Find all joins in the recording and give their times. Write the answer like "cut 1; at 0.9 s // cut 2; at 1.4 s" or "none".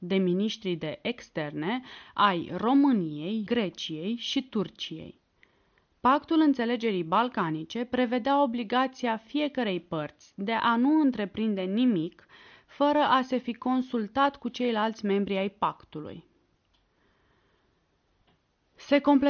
cut 1; at 3.5 s